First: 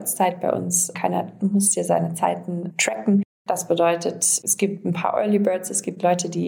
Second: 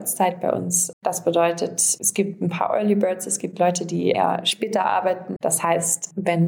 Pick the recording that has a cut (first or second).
second